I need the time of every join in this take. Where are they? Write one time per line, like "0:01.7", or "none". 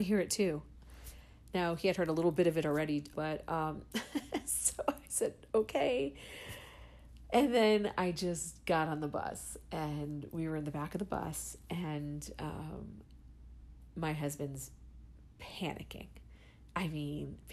0:03.1